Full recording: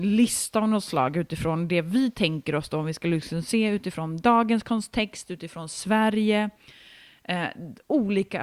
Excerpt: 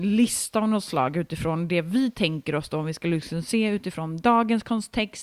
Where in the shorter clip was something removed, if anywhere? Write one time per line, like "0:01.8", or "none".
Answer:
none